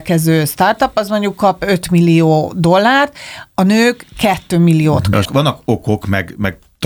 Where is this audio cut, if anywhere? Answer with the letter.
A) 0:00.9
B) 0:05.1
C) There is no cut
B